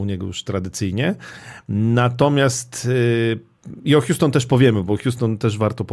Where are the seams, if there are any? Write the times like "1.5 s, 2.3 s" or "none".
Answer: none

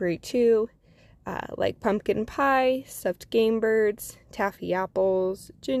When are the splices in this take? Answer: none

